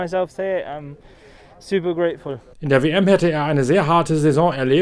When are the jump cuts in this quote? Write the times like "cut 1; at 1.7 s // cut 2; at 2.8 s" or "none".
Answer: cut 1; at 2.5 s